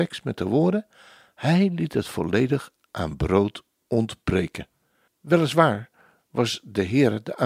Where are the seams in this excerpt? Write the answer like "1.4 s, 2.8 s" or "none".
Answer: 5.1 s